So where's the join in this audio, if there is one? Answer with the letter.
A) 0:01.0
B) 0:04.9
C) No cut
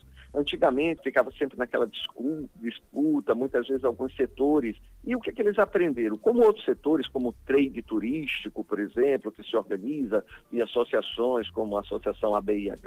A